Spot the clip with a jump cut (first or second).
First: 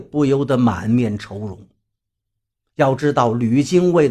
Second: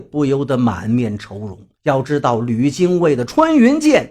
second